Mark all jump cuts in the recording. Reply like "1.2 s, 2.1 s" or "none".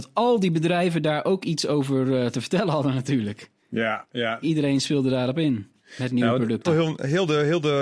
4.4 s, 6.7 s